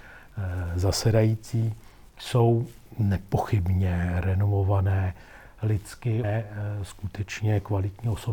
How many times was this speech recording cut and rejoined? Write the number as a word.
one